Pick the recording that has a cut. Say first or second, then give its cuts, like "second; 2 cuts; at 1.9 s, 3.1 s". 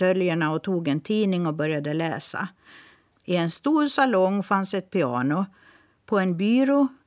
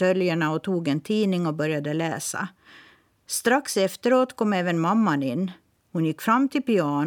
first; 1 cut; at 3.1 s